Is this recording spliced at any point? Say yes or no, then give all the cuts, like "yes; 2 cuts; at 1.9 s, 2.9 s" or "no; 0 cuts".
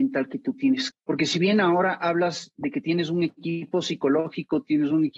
yes; 1 cut; at 0.9 s